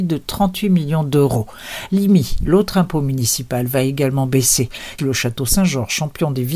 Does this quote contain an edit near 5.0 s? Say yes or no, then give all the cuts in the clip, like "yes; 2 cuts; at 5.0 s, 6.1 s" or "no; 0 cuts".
yes; 1 cut; at 5.0 s